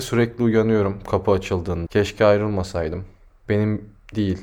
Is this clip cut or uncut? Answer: cut